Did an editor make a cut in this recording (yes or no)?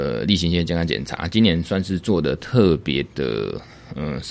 no